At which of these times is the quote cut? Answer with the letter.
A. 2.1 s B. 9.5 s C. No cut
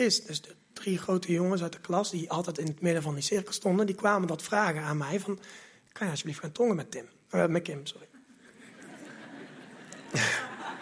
C